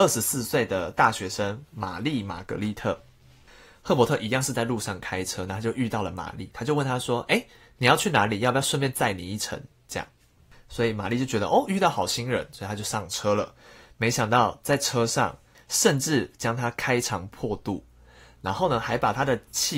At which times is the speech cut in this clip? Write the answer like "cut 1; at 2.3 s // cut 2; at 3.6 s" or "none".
cut 1; at 15.5 s